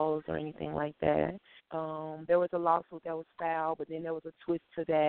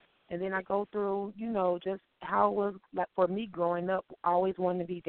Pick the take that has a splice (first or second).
first